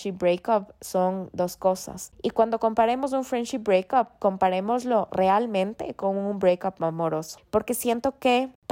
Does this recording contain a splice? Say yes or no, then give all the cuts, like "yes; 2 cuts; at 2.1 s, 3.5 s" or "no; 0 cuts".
no; 0 cuts